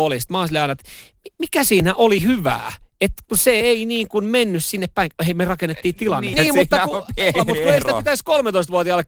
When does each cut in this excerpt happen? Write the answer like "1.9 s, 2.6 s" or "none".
6.3 s, 7.3 s